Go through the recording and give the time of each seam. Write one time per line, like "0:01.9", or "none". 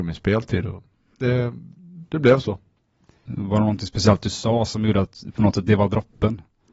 0:03.3